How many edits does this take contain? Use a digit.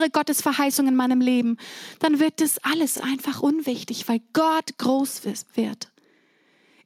0